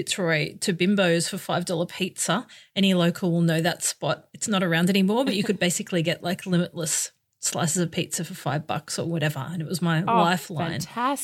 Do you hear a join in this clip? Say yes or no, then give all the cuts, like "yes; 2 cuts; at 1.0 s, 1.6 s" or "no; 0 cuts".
no; 0 cuts